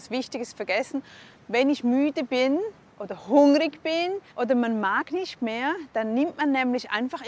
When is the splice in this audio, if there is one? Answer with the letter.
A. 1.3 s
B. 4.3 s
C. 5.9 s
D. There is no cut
B